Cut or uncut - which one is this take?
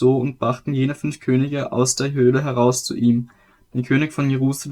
uncut